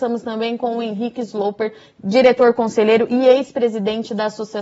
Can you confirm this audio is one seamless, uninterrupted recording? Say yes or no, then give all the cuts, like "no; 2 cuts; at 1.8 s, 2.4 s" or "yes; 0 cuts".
yes; 0 cuts